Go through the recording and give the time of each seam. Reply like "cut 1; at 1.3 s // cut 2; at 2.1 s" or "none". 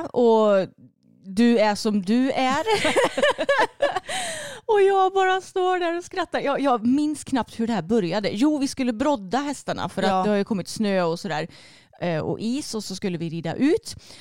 none